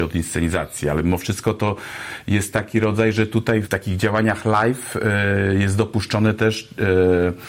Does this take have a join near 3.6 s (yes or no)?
yes